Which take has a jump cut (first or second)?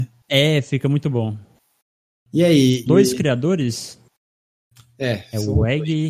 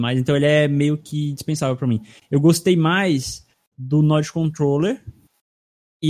first